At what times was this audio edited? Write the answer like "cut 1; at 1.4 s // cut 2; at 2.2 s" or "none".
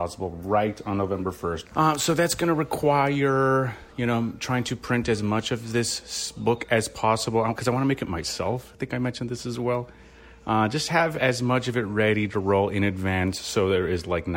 cut 1; at 1.6 s